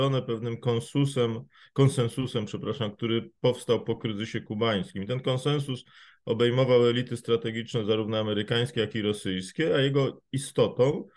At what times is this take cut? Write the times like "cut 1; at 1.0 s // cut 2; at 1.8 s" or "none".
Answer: none